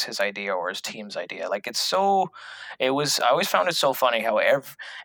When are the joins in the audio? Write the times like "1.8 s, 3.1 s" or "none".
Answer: none